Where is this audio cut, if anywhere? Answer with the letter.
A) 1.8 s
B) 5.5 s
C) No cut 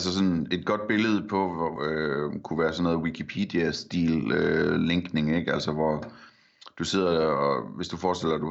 A